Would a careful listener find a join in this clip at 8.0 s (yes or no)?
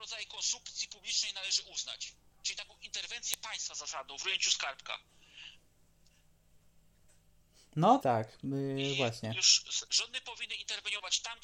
yes